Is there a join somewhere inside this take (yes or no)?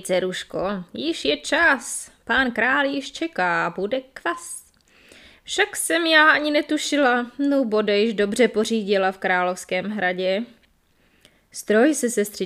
no